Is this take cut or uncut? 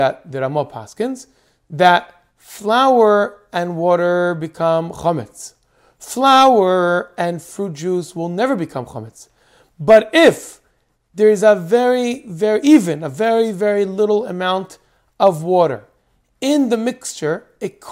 uncut